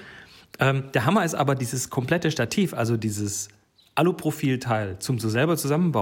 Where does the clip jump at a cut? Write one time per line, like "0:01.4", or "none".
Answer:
none

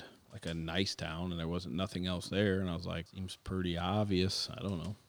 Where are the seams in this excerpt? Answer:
0:03.1

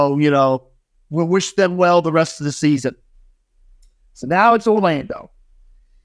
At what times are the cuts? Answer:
none

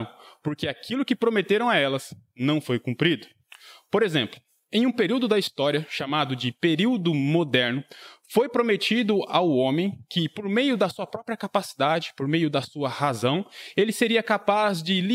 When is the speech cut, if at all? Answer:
none

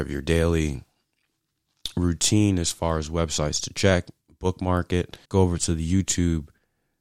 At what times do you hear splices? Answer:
0:05.2

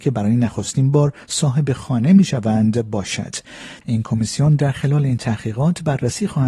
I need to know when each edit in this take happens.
0:03.8

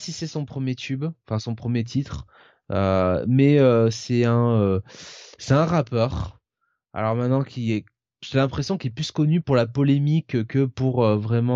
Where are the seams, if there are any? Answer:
none

